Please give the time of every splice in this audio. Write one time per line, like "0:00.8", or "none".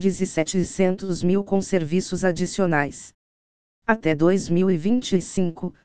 none